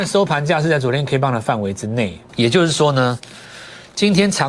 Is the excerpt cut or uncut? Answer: cut